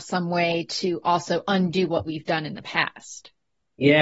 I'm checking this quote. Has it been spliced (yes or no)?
no